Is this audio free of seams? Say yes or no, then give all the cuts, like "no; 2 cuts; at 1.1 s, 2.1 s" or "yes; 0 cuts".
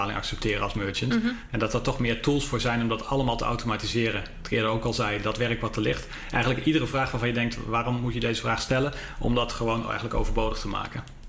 yes; 0 cuts